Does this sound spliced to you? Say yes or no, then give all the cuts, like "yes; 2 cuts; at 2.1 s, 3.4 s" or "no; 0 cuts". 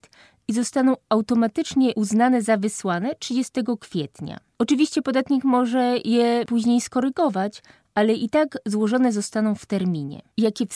no; 0 cuts